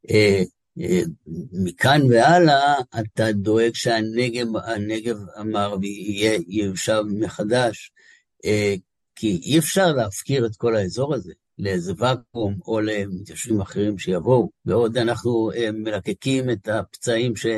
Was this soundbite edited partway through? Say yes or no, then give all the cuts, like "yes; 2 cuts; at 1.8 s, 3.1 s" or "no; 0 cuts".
yes; 2 cuts; at 9.1 s, 14.6 s